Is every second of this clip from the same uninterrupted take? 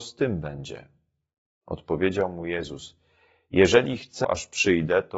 no; 1 cut; at 4.2 s

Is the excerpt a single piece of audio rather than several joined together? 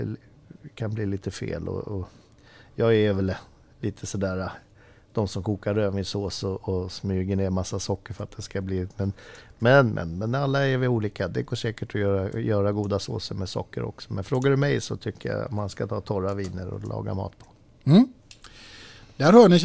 yes; 0 cuts

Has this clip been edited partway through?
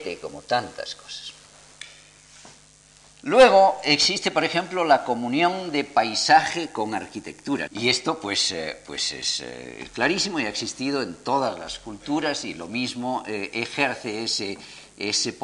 yes; 1 cut; at 7.7 s

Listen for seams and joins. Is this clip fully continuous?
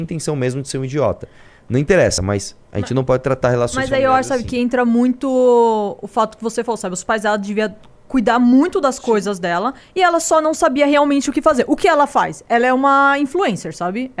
yes; 0 cuts

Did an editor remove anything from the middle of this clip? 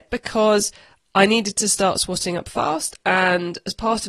no; 0 cuts

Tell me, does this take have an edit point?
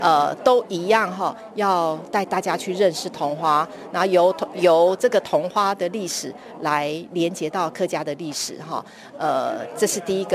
no; 0 cuts

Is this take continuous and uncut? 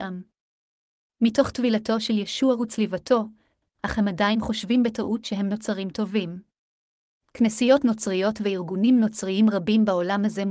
no; 2 cuts; at 3.6 s, 7.2 s

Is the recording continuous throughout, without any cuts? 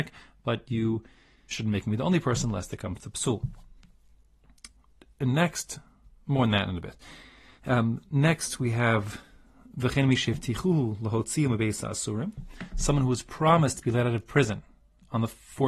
no; 1 cut; at 1.5 s

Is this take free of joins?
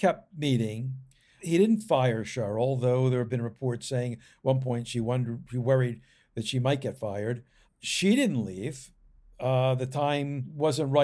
yes; 0 cuts

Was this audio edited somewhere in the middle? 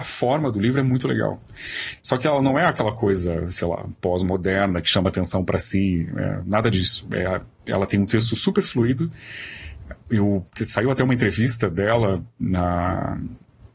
no; 0 cuts

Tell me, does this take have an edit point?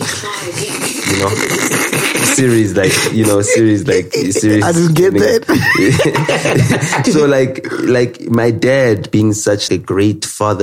yes; 2 cuts; at 7.0 s, 9.7 s

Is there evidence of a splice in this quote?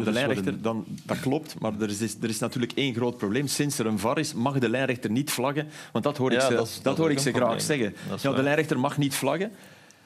no; 0 cuts

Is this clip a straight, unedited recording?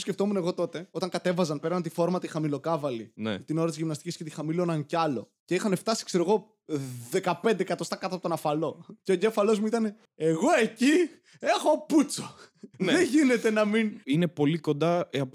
no; 2 cuts; at 12.7 s, 14.0 s

